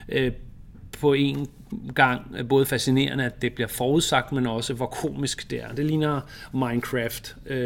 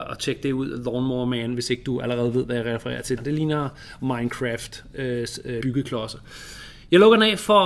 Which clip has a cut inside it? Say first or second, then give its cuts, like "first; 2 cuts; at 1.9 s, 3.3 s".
second; 2 cuts; at 3.2 s, 5.6 s